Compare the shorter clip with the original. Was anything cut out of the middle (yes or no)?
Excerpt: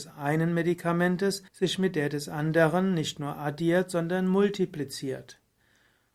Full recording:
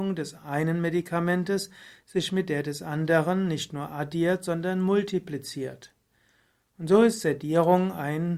yes